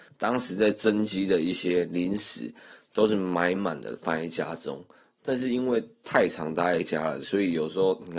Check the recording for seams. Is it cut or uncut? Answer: cut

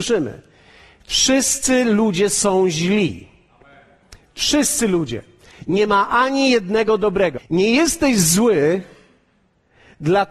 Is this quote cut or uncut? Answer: cut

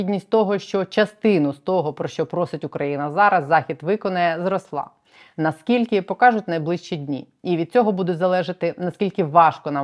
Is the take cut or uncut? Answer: uncut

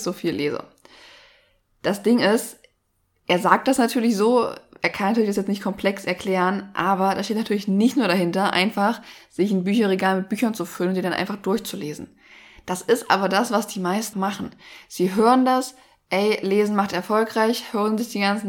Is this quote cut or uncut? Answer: cut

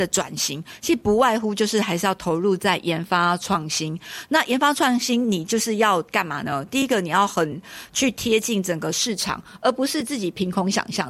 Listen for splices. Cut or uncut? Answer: uncut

